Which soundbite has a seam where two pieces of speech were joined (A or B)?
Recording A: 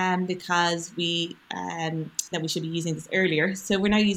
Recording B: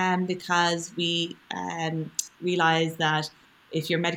A